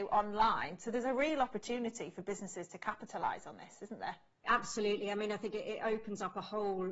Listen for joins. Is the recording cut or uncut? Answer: uncut